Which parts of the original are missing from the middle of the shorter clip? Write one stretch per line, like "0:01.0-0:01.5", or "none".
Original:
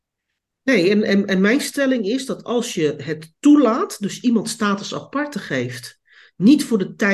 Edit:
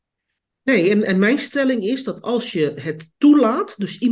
0:01.0-0:01.3